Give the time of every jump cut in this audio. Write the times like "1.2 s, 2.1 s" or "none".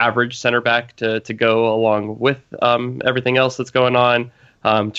none